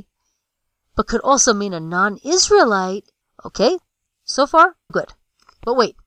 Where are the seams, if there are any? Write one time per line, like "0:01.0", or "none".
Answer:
0:03.2
0:04.9